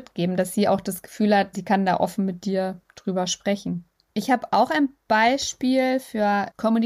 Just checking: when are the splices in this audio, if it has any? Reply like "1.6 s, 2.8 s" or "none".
1.5 s